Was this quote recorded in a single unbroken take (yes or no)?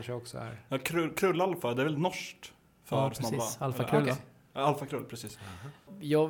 yes